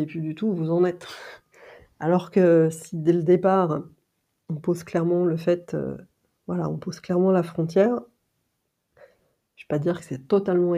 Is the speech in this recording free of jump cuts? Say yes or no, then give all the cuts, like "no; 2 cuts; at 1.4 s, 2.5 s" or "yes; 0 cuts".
yes; 0 cuts